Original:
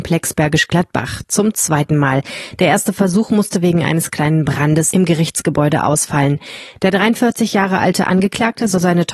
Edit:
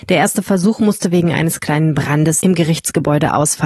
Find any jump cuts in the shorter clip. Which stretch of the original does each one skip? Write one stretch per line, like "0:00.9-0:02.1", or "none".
none